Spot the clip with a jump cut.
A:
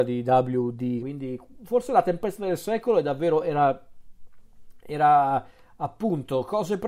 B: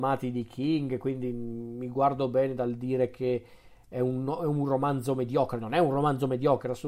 A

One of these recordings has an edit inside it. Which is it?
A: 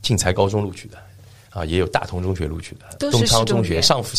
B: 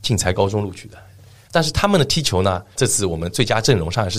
B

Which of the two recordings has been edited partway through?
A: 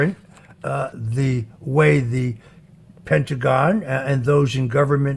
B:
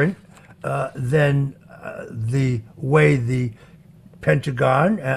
A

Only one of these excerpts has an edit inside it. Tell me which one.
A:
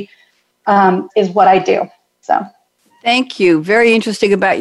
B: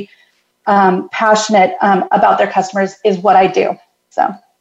A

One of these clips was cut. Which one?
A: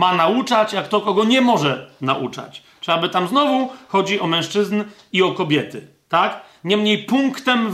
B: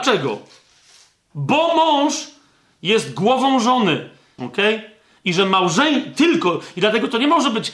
B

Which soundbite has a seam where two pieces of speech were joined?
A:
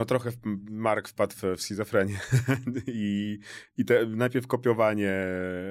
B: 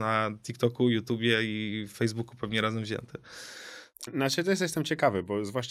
B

